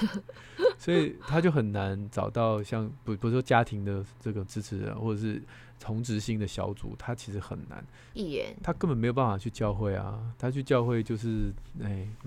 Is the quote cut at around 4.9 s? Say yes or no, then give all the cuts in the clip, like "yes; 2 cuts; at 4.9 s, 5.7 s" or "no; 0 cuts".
no; 1 cut; at 8.1 s